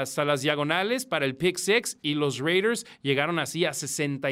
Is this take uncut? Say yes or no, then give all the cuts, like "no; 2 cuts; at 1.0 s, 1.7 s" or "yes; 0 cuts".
yes; 0 cuts